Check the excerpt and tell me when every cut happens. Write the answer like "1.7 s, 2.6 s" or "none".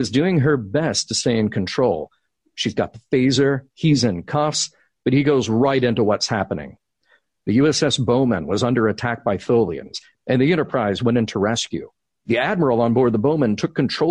none